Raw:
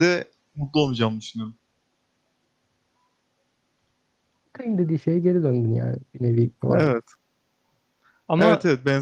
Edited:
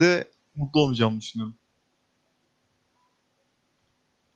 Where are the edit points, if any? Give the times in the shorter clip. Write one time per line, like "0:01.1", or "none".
none